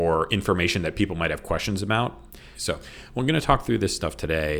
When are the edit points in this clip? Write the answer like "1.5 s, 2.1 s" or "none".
2.5 s